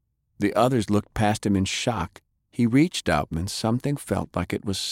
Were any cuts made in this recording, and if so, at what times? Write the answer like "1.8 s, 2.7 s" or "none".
3.3 s

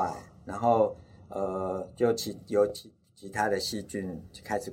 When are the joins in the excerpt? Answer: none

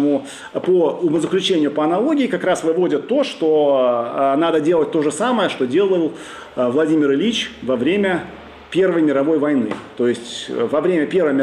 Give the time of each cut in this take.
none

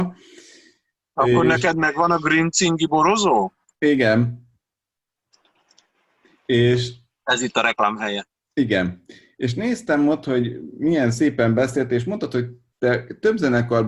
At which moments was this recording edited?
none

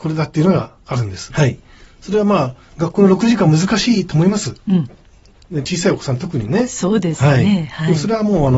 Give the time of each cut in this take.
1.3 s

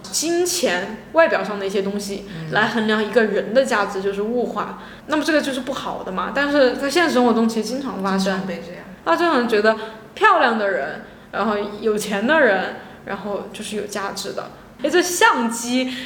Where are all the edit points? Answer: 14.8 s

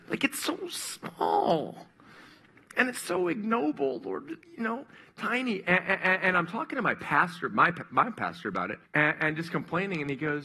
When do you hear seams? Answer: 4.4 s, 8.8 s

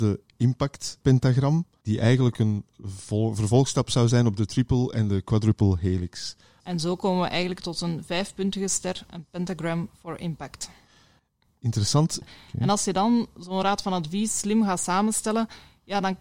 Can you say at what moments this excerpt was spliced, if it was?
6.6 s, 12.2 s

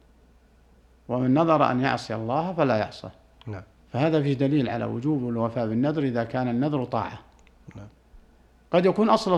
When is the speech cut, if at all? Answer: none

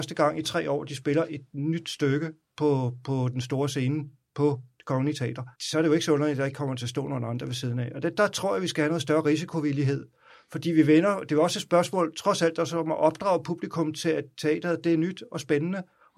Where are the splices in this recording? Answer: 5.5 s

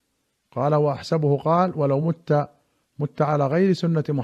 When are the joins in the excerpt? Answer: none

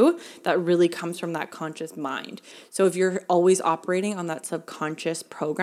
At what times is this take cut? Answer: none

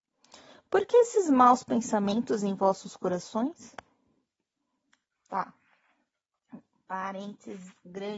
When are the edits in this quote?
none

